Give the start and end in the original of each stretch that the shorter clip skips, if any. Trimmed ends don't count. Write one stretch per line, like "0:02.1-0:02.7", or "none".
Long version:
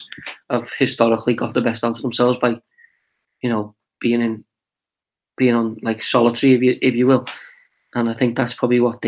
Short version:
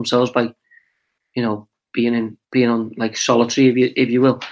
0:04.5-0:05.3